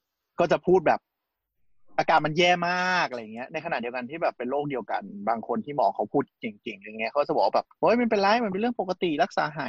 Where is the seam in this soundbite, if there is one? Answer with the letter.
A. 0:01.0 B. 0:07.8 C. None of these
B